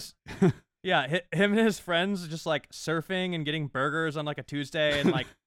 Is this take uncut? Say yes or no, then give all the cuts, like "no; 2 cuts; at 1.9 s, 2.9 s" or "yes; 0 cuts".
yes; 0 cuts